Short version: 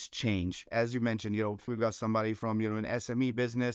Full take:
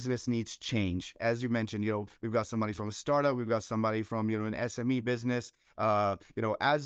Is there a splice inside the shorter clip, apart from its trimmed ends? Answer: yes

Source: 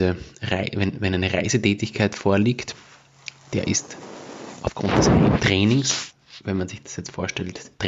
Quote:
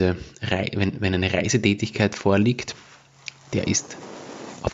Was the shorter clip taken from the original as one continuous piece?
yes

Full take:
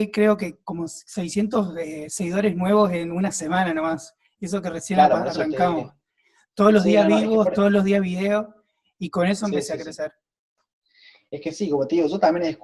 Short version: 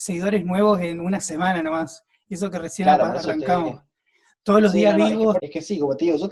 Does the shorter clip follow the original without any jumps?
no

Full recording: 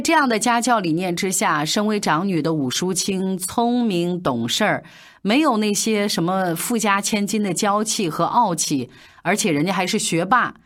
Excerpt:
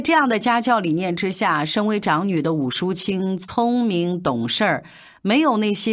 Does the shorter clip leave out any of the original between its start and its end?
no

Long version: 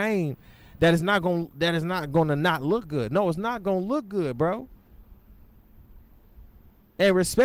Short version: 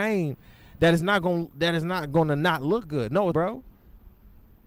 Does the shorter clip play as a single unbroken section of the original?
no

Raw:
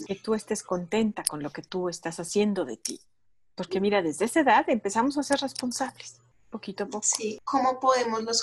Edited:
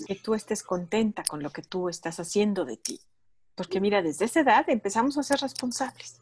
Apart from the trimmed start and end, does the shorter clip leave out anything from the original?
no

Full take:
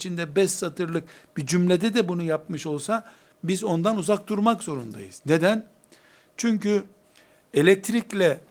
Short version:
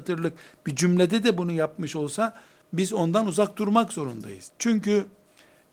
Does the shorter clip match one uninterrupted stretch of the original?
no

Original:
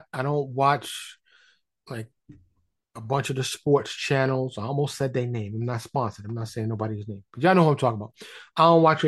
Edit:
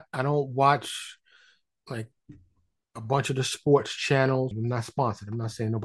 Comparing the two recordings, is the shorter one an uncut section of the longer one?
no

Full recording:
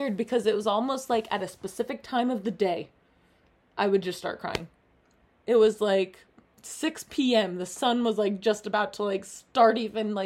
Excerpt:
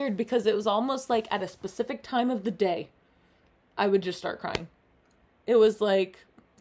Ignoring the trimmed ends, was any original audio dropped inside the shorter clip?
no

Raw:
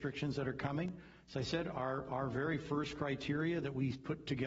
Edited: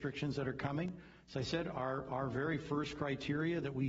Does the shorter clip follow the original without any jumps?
yes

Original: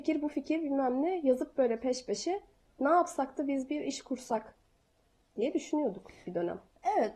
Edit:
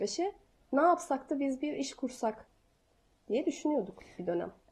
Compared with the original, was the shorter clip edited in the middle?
no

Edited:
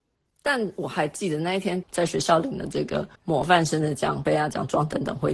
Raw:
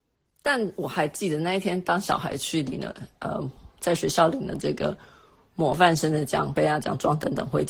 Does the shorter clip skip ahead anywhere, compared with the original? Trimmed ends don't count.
yes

